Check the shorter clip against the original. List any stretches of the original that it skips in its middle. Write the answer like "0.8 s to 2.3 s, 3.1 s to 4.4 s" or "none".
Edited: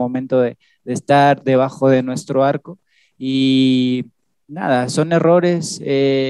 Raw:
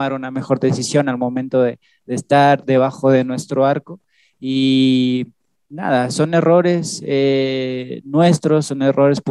none